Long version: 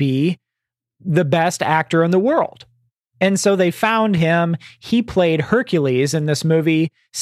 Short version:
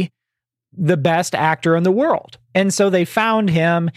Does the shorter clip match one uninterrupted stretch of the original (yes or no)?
no